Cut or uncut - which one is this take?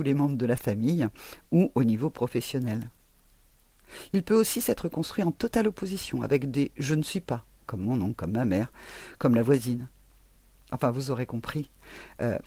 cut